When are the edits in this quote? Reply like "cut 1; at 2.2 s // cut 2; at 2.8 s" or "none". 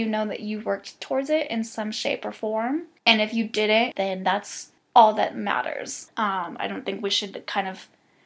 cut 1; at 3.9 s